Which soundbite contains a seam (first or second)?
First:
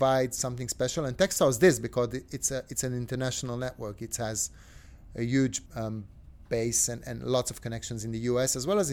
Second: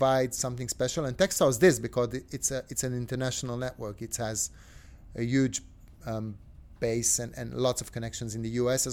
first